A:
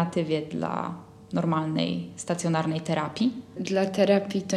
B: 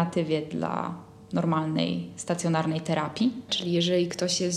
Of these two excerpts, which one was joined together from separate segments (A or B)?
B